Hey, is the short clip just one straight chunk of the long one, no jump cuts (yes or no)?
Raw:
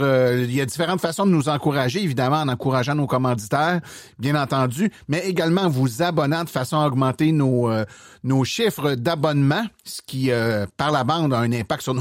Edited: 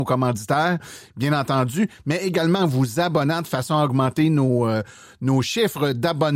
yes